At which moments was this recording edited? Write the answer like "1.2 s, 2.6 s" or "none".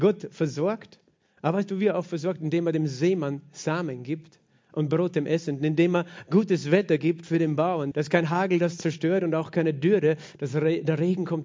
7.9 s, 10.3 s